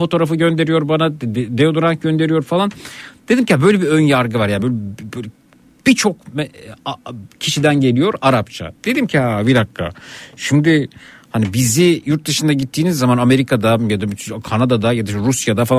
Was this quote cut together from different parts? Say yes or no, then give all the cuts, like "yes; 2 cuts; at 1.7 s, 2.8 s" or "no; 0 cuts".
no; 0 cuts